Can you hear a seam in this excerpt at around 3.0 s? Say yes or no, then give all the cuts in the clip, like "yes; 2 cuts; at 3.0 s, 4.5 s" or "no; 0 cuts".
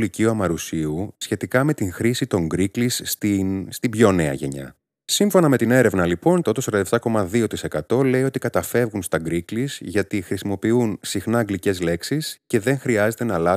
no; 1 cut; at 6.4 s